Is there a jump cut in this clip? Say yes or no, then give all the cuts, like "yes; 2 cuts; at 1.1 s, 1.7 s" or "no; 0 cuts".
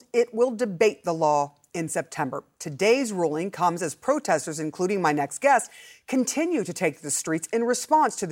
no; 0 cuts